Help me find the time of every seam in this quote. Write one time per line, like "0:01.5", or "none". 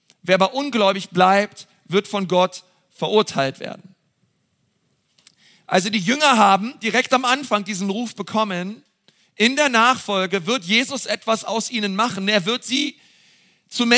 none